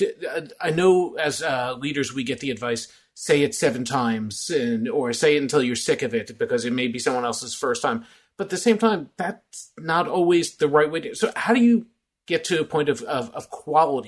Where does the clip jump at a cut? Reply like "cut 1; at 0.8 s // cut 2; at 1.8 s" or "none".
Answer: none